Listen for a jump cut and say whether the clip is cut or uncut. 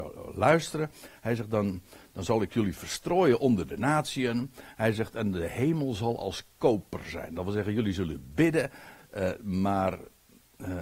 cut